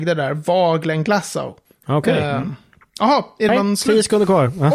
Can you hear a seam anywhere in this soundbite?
yes; 2 cuts; at 1.8 s, 3.5 s

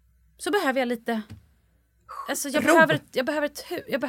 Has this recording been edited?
no; 0 cuts

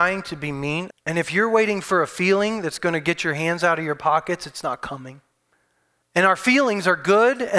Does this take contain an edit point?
yes; 2 cuts; at 0.9 s, 6.0 s

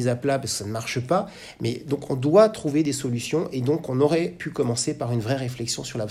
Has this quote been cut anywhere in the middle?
no; 0 cuts

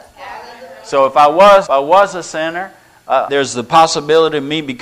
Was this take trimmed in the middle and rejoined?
yes; 2 cuts; at 1.7 s, 3.3 s

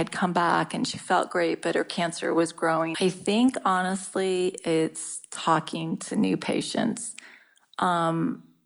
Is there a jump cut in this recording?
yes; 1 cut; at 2.9 s

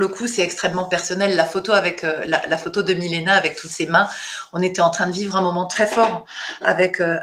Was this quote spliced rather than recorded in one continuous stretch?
no; 0 cuts

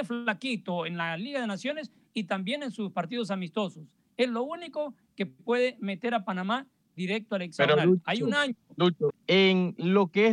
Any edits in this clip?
yes; 1 cut; at 9.1 s

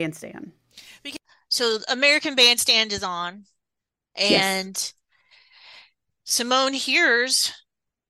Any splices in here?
no; 0 cuts

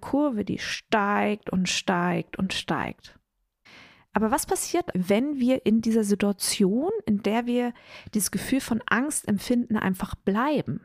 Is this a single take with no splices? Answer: no; 1 cut; at 4.9 s

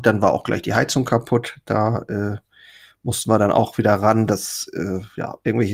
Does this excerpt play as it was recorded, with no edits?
yes; 0 cuts

